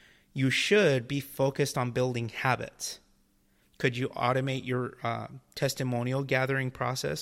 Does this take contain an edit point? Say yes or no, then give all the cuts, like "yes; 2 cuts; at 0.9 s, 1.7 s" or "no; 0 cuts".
yes; 1 cut; at 3.6 s